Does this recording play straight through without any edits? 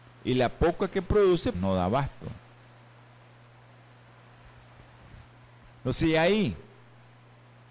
no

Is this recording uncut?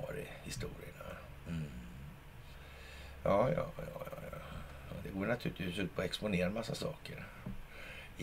yes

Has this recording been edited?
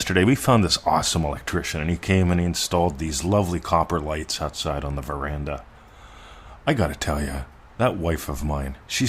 no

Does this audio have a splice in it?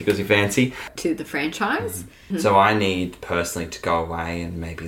yes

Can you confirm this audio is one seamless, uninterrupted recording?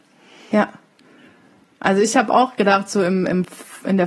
yes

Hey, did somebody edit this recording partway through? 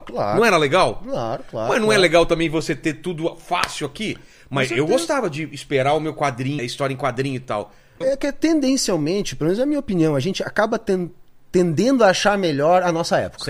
yes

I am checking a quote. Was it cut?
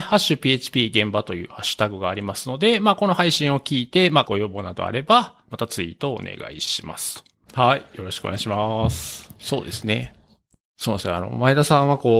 yes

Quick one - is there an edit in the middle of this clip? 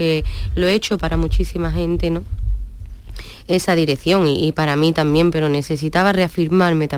yes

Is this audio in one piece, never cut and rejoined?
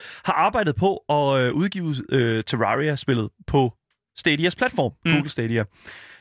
yes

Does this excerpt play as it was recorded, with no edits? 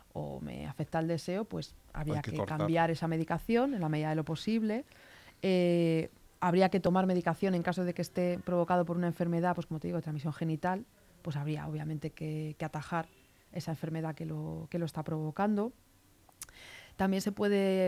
yes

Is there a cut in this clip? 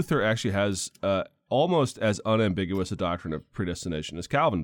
no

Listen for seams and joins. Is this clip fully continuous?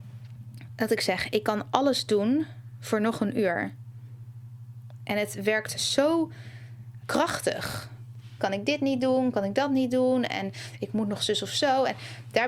no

